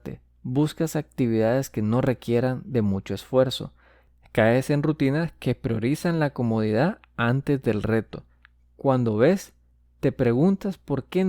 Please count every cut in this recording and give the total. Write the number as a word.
zero